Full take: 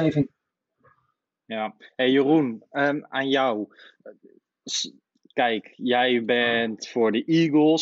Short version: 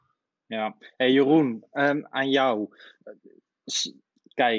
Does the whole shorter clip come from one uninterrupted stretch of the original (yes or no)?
yes